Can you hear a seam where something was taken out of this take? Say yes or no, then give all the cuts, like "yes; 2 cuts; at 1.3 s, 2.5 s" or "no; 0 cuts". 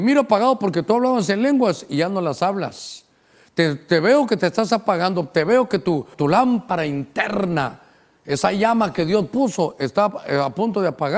yes; 1 cut; at 6.1 s